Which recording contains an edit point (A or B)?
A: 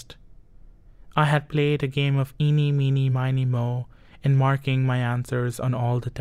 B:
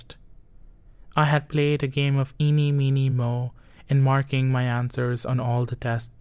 B